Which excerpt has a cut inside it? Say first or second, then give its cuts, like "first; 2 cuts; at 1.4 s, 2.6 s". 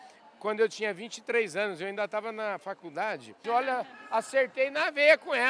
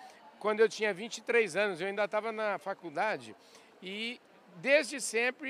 first; 1 cut; at 3.4 s